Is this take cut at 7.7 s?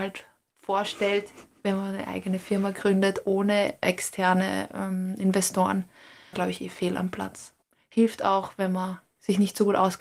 no; 1 cut; at 6.3 s

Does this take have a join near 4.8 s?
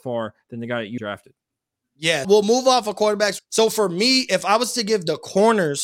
no; 3 cuts; at 1.0 s, 2.2 s, 3.4 s

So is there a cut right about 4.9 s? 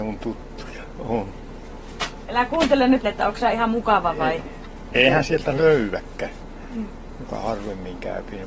yes; 2 cuts; at 3.0 s, 4.9 s

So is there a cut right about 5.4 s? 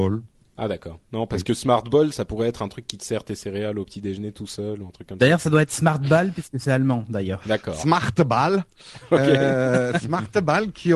no; 0 cuts

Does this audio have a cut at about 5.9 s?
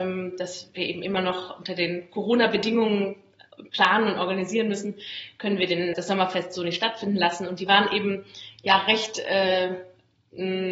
yes; 1 cut; at 5.9 s

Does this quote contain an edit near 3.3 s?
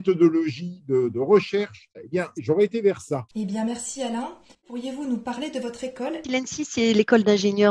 yes; 3 cuts; at 3.3 s, 4.5 s, 6.2 s

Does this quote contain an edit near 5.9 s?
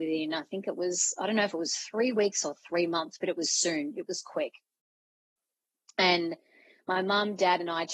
no; 0 cuts

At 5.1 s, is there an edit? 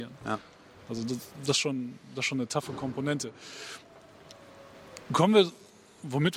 no; 0 cuts

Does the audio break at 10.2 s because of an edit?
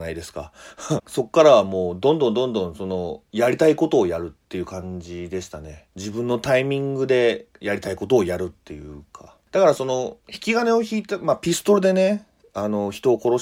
no; 1 cut; at 1.0 s

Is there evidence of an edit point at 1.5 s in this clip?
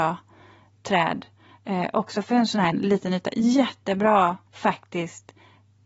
no; 2 cuts; at 2.7 s, 4.5 s

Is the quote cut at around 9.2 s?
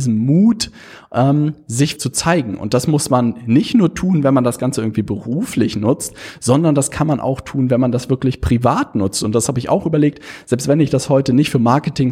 no; 1 cut; at 2.0 s

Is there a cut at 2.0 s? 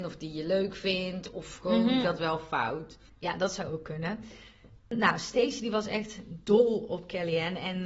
yes; 1 cut; at 2.0 s

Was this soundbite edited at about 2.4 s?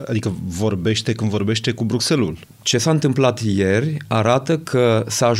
yes; 1 cut; at 2.4 s

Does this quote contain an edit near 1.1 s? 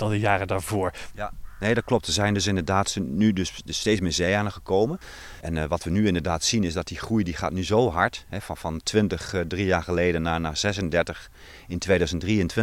yes; 1 cut; at 1.1 s

